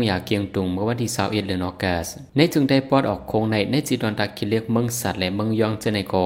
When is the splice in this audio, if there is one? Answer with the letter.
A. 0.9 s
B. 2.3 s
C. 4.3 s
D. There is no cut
B